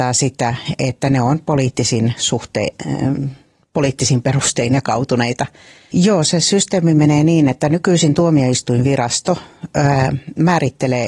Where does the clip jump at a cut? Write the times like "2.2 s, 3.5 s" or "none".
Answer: 5.9 s